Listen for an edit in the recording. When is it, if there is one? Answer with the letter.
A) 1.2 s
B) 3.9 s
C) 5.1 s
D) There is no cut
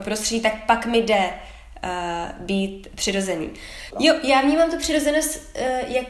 B